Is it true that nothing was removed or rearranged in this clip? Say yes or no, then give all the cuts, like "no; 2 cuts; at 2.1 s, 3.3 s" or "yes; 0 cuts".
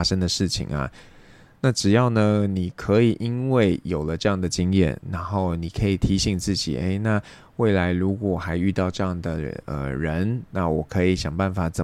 yes; 0 cuts